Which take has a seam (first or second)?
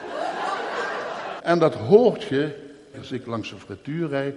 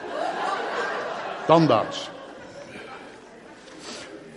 first